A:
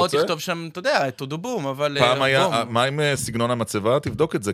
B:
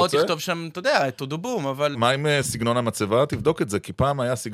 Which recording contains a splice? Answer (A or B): B